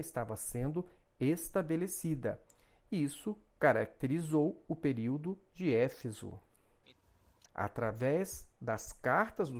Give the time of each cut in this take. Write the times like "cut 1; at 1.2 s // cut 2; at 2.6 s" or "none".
cut 1; at 7.4 s